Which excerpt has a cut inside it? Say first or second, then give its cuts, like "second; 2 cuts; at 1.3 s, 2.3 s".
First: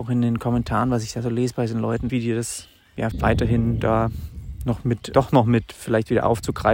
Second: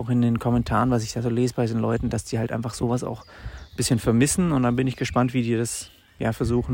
first; 3 cuts; at 2.1 s, 3.1 s, 5.1 s